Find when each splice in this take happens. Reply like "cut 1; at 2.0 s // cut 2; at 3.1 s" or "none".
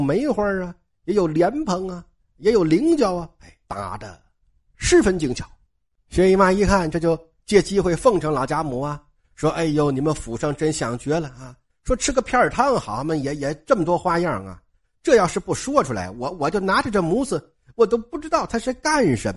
cut 1; at 3.6 s